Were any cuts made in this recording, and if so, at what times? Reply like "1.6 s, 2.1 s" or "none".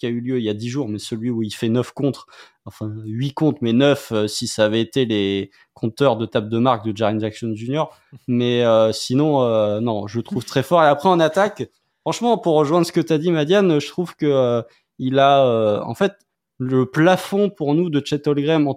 none